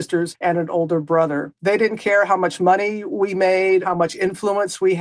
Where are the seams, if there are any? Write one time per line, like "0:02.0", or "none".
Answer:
0:01.6